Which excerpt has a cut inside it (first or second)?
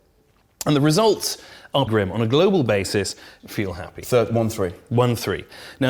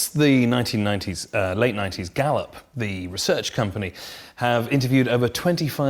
first